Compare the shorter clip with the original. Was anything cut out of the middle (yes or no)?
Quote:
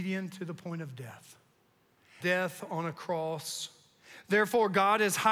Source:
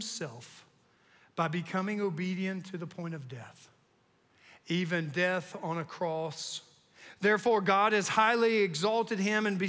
yes